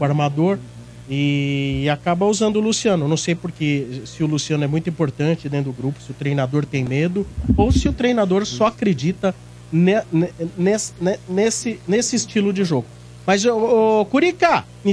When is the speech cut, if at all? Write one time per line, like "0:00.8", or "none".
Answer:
none